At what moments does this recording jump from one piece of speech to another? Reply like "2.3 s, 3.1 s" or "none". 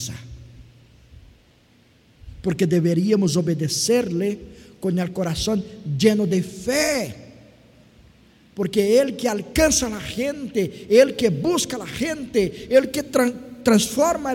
none